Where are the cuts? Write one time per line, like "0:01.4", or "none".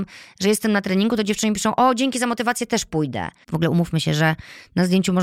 0:03.4